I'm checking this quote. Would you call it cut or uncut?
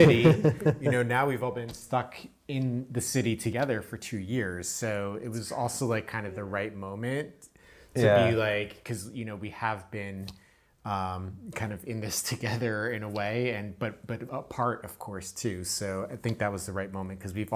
uncut